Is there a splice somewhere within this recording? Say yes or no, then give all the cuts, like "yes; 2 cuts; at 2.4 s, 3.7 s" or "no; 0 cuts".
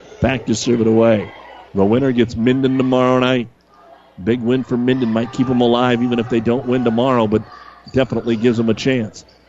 yes; 1 cut; at 1.7 s